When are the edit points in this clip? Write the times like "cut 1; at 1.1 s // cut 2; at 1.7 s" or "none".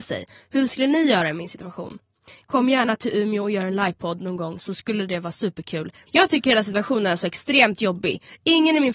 cut 1; at 6.1 s